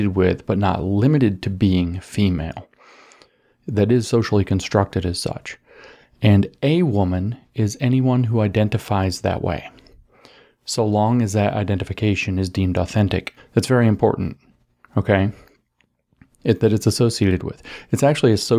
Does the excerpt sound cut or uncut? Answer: cut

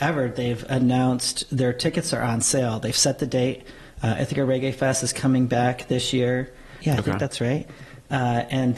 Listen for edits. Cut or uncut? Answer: cut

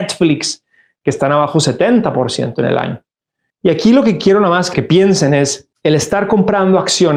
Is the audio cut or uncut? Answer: cut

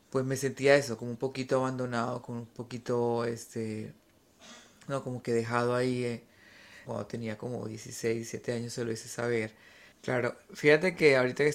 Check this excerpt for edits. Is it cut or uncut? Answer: cut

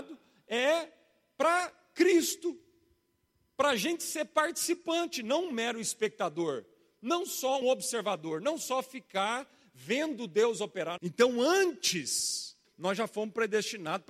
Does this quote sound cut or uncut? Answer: cut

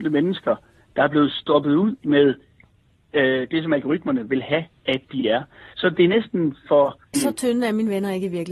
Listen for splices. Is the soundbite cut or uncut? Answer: cut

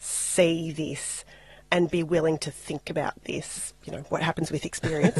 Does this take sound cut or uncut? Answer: cut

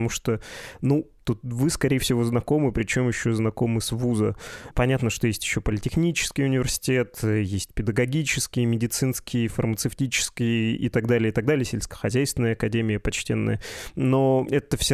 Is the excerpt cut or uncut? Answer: cut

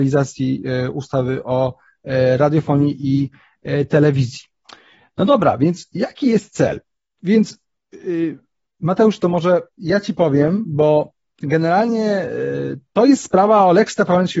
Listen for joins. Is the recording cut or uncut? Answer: uncut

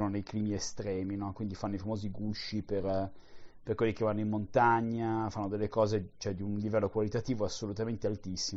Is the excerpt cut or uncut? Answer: uncut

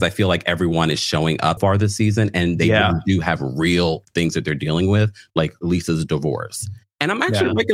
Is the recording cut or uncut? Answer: cut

